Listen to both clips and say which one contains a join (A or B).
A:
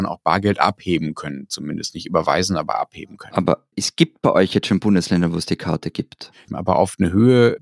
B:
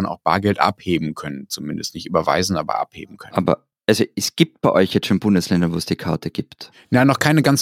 A